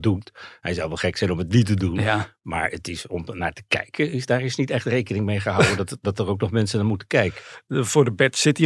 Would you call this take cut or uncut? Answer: uncut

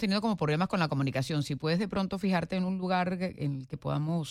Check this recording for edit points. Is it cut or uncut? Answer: uncut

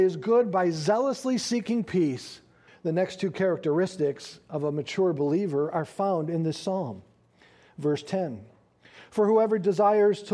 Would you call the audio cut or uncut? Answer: cut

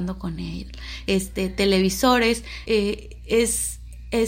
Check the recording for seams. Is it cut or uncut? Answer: cut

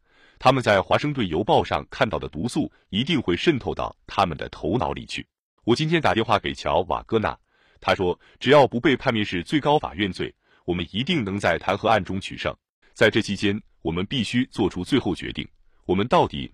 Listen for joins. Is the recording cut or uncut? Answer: cut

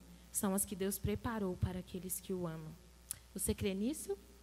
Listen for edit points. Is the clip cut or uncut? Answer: uncut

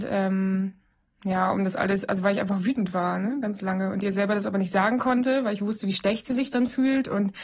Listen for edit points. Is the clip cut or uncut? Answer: uncut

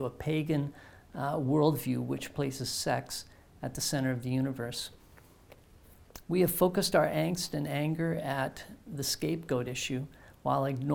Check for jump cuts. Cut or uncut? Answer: cut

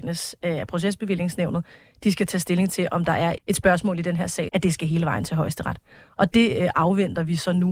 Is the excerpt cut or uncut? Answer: cut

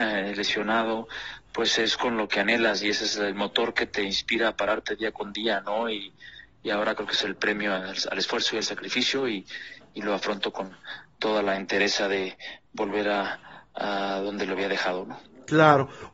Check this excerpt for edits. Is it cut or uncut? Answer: uncut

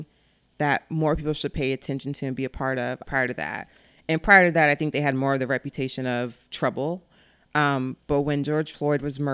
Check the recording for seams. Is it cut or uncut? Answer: cut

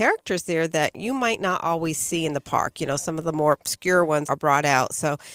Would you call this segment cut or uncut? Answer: cut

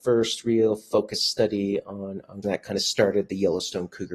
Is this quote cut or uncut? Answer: cut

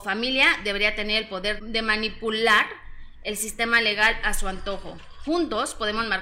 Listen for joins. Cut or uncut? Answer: cut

